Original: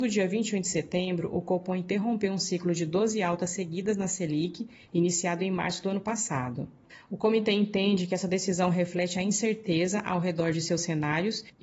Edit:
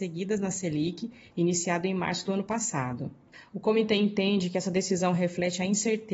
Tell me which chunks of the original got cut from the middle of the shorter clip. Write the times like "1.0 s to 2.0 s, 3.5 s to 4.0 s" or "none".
none